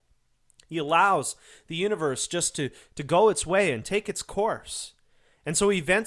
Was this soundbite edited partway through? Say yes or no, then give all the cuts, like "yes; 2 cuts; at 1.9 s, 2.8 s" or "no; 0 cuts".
no; 0 cuts